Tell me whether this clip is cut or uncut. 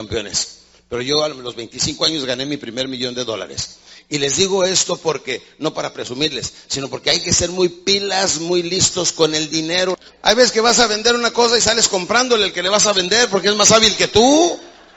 uncut